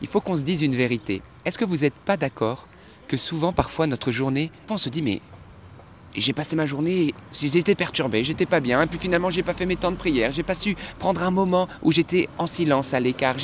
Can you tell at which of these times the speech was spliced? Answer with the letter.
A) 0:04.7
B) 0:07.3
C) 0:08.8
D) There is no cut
A